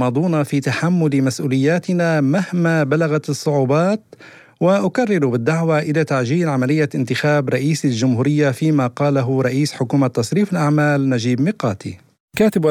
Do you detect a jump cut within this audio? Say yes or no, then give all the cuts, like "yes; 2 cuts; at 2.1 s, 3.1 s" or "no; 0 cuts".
no; 0 cuts